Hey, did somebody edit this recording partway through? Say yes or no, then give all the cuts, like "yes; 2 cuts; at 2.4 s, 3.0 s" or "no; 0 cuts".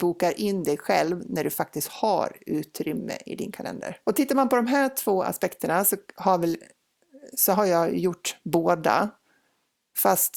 yes; 1 cut; at 4.0 s